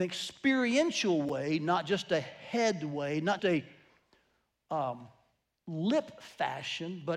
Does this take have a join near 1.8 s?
no; 1 cut; at 3.4 s

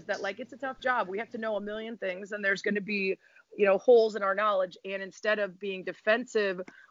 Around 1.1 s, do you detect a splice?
no; 0 cuts

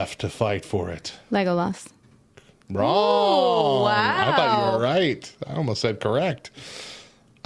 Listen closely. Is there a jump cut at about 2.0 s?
no; 0 cuts

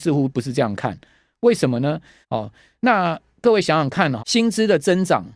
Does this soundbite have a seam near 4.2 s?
yes; 2 cuts; at 2.2 s, 4.2 s

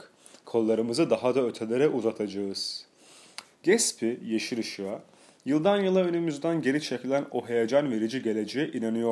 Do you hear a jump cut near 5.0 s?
no; 1 cut; at 3.4 s

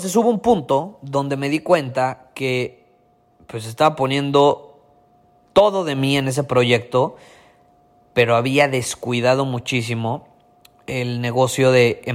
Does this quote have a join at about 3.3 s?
no; 0 cuts

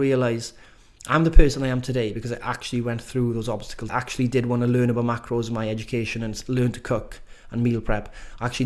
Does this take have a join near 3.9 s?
yes; 1 cut; at 3.9 s

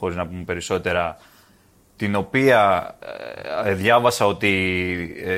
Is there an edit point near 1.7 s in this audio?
no; 0 cuts

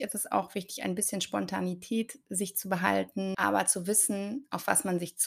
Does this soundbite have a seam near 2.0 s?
no; 1 cut; at 3.3 s

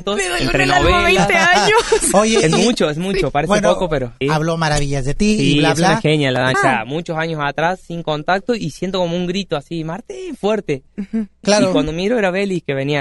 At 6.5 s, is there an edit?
yes; 3 cuts; at 4.2 s, 6.5 s, 11.4 s

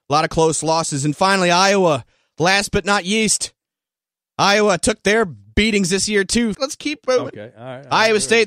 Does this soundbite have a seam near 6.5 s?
yes; 1 cut; at 6.5 s

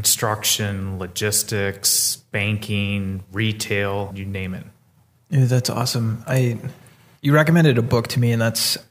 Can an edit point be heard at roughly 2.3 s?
no; 1 cut; at 4.1 s

